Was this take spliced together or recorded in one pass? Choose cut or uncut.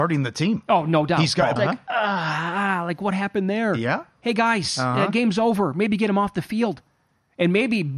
cut